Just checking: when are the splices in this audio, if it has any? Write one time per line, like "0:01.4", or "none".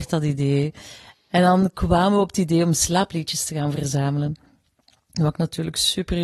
none